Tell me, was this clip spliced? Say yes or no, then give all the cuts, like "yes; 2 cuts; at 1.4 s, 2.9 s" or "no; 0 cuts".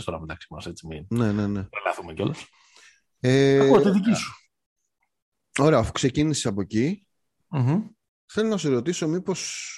no; 0 cuts